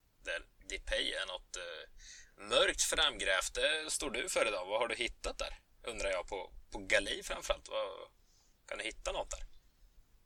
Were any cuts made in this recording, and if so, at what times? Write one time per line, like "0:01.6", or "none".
none